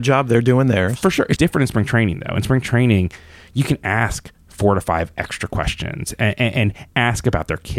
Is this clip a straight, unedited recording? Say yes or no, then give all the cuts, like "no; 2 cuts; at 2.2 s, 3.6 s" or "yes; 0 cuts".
no; 1 cut; at 1.4 s